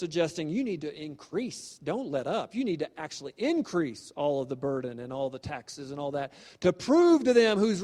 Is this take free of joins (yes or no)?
yes